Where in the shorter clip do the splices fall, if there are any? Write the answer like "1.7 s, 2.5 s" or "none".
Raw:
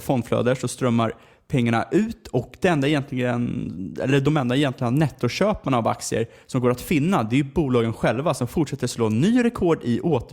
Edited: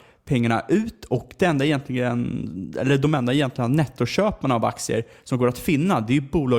none